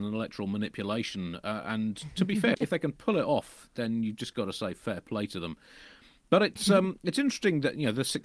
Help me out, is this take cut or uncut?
cut